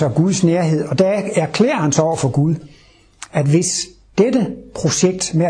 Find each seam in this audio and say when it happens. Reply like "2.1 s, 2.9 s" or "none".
none

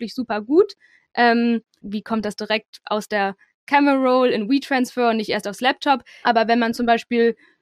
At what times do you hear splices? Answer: 1.8 s, 6.2 s

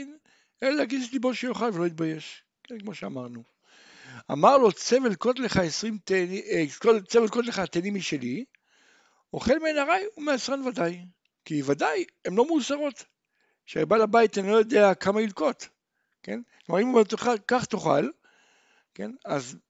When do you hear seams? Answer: 11.4 s

